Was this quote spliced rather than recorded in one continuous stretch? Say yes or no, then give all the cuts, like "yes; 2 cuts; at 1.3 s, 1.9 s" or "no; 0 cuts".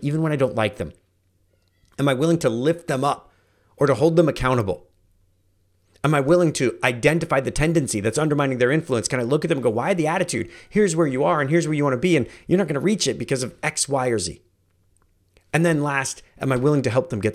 no; 0 cuts